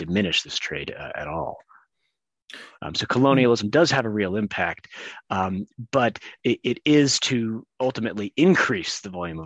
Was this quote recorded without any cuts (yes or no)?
no